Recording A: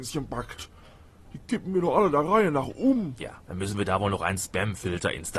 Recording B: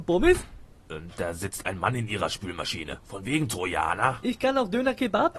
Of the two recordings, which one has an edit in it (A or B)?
B